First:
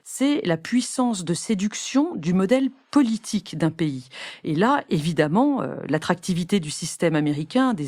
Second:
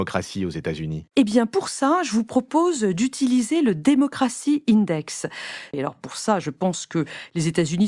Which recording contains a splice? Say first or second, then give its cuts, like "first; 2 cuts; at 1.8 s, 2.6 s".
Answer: second; 2 cuts; at 1.1 s, 5.7 s